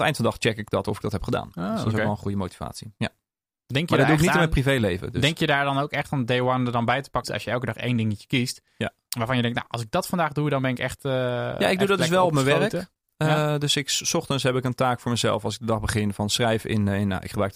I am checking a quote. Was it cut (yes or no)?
yes